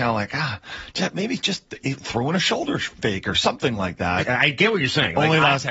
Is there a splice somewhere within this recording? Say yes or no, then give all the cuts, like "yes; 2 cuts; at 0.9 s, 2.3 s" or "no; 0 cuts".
yes; 1 cut; at 4.2 s